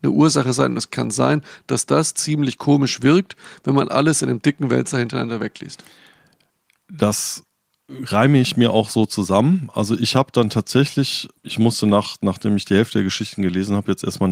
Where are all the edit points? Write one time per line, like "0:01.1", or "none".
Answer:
0:11.4